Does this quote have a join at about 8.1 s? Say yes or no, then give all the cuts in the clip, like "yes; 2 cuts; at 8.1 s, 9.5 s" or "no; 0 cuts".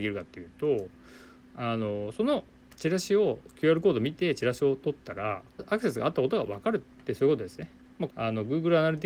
yes; 3 cuts; at 5.6 s, 6.9 s, 8.1 s